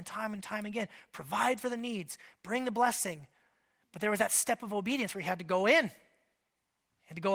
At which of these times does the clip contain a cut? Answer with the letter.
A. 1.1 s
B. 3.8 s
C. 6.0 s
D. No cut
D